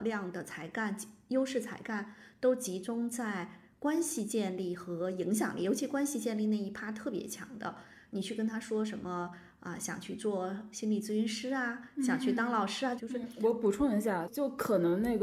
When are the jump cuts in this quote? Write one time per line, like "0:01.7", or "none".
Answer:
0:13.0